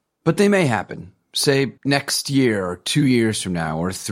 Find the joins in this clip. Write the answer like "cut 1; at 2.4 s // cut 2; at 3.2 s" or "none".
cut 1; at 1.8 s